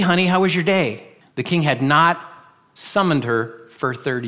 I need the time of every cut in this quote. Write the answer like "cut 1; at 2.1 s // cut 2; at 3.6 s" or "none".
cut 1; at 1.2 s